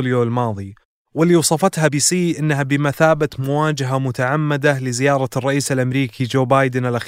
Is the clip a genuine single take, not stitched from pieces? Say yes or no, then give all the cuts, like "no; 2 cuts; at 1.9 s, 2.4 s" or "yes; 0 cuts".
no; 1 cut; at 1.9 s